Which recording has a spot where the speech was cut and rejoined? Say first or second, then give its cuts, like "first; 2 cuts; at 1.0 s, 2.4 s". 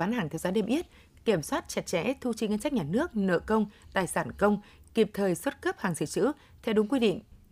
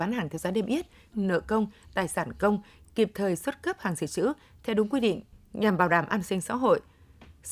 second; 1 cut; at 1.1 s